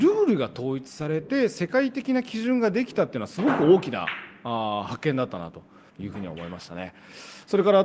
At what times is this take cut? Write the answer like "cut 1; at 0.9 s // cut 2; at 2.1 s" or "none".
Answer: cut 1; at 5.9 s